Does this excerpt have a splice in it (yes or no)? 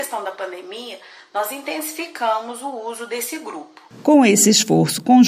no